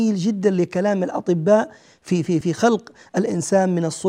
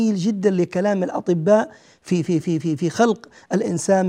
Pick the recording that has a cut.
first; 1 cut; at 2.4 s

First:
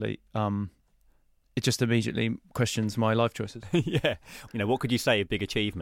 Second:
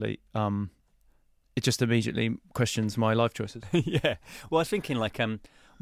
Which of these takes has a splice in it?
first; 1 cut; at 4.5 s

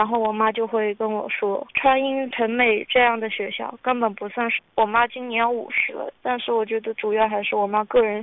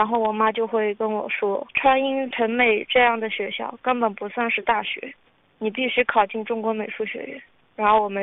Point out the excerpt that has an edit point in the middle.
first; 2 cuts; at 4.6 s, 6.2 s

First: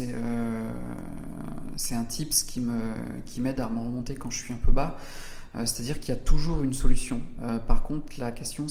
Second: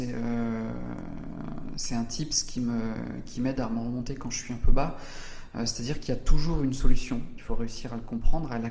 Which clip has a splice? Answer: second; 1 cut; at 7.4 s

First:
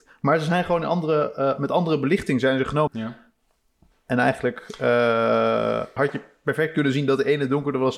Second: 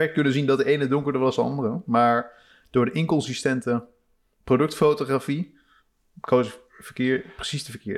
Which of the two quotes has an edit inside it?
first; 2 cuts; at 2.9 s, 6.0 s

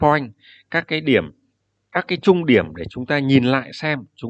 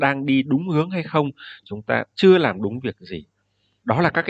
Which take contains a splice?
second; 1 cut; at 1.6 s

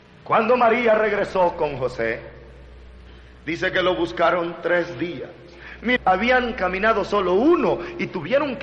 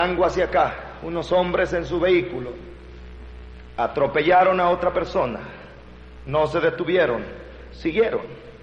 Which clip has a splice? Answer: first; 1 cut; at 6.0 s

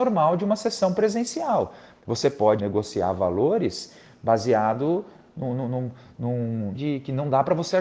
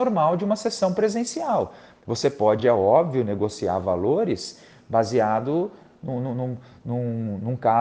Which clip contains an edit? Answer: first; 2 cuts; at 2.6 s, 6.7 s

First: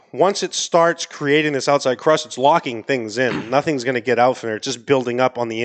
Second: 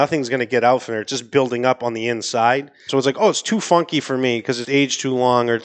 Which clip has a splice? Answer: second; 2 cuts; at 2.9 s, 4.6 s

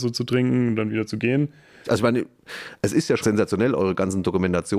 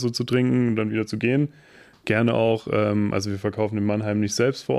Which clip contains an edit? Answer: first; 2 cuts; at 1.8 s, 3.2 s

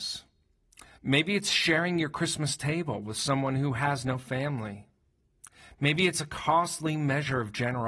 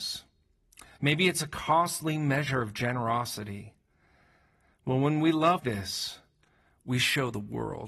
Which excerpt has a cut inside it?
second; 2 cuts; at 1.0 s, 5.6 s

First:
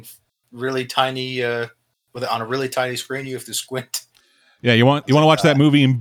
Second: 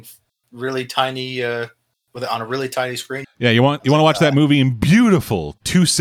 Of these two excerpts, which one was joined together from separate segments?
second; 1 cut; at 3.2 s

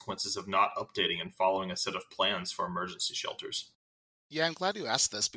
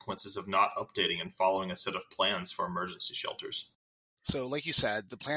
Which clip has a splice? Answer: second; 1 cut; at 4.2 s

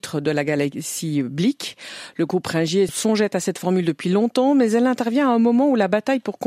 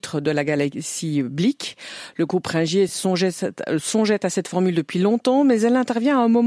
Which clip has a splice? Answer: first; 1 cut; at 2.9 s

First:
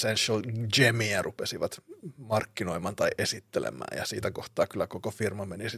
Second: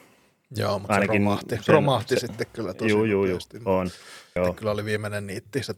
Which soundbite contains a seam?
second; 1 cut; at 4.4 s

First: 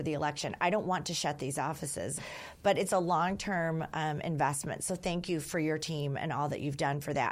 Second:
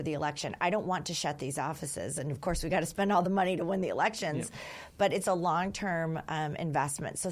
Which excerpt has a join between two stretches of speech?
first; 1 cut; at 2.2 s

